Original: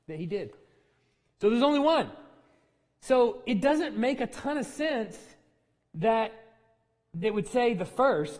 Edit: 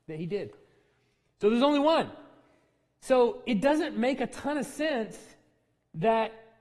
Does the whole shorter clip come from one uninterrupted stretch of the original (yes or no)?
yes